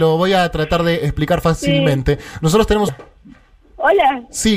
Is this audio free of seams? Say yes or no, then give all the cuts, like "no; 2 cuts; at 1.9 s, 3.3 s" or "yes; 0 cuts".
no; 1 cut; at 2.9 s